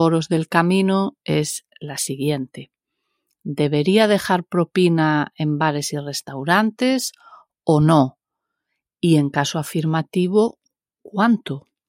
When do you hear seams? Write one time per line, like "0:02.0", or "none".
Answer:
none

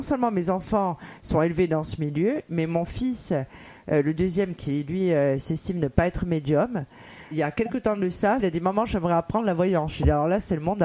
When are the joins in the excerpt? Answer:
0:07.3
0:08.4

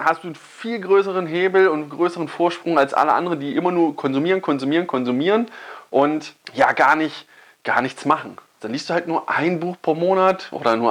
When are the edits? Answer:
0:06.4
0:08.6

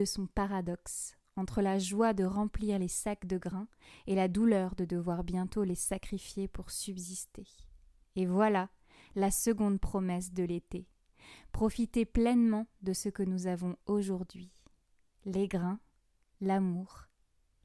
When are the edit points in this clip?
0:08.0

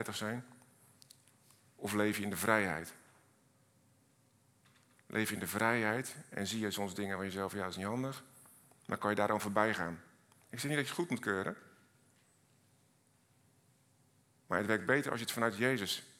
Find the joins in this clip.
none

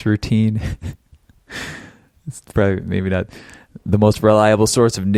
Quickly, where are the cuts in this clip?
none

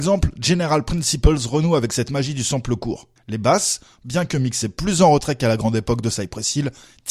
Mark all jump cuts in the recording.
0:03.2

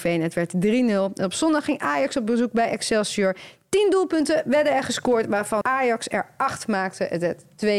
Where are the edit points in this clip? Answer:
0:05.6

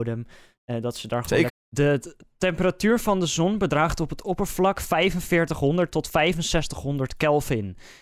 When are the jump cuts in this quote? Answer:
0:01.5

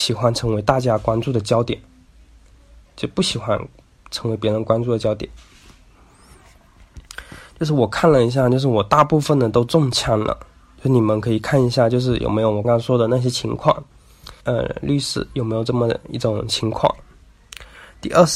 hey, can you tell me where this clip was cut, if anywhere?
0:12.6
0:14.4

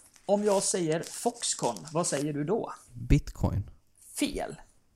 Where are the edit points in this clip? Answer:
none

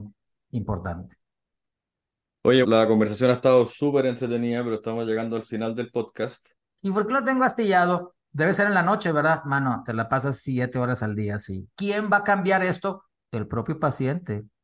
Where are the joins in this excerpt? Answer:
0:02.6
0:06.8
0:11.7

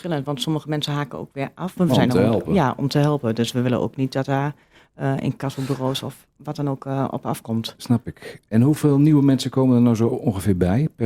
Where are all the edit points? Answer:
0:01.8

